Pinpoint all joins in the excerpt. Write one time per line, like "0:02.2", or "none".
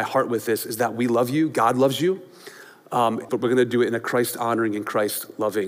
0:03.3